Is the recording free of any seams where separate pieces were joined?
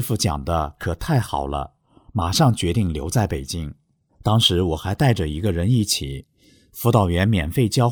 no; 1 cut; at 4.1 s

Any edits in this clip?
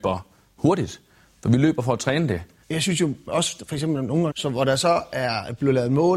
yes; 2 cuts; at 2.6 s, 4.3 s

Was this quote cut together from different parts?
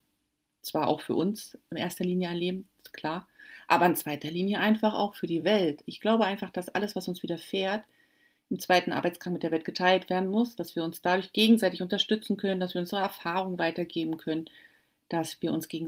no; 0 cuts

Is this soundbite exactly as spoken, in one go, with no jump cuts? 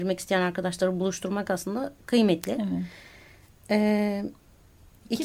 yes; 0 cuts

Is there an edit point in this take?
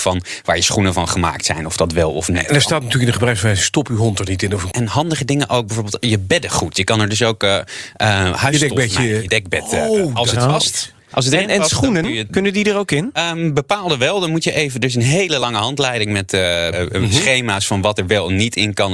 yes; 3 cuts; at 4.7 s, 12.3 s, 16.7 s

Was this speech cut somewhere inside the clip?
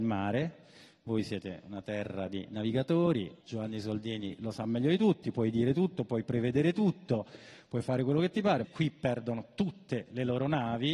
yes; 2 cuts; at 3.4 s, 8.6 s

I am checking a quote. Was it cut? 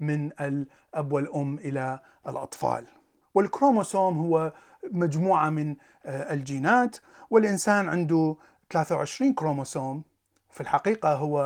no; 0 cuts

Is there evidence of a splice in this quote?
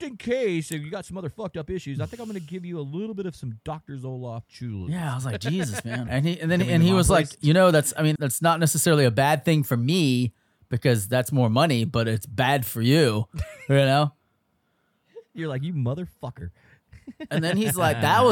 yes; 2 cuts; at 6.1 s, 8.2 s

